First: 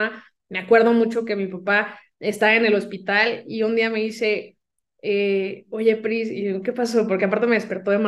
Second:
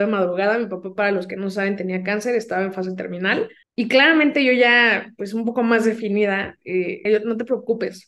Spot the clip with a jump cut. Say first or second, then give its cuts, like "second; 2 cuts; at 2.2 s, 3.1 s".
second; 2 cuts; at 3.6 s, 7.1 s